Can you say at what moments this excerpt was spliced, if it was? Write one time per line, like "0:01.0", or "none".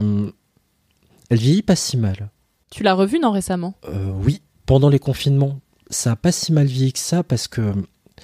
none